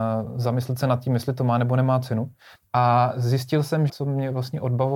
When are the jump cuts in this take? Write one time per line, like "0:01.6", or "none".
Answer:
0:02.6
0:03.9